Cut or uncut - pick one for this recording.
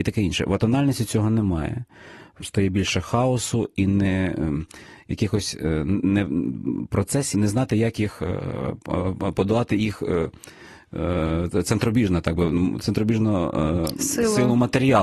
cut